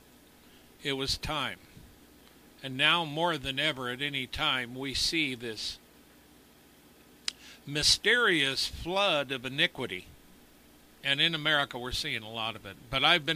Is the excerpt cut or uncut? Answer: uncut